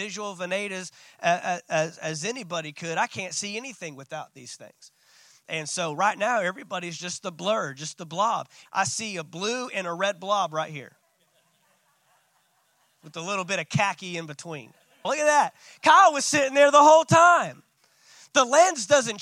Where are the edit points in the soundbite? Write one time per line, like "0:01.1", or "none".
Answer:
0:08.7
0:15.0